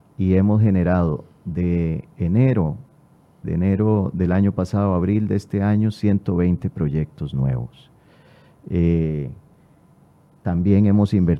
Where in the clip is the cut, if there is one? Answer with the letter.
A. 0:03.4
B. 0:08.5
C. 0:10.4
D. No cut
A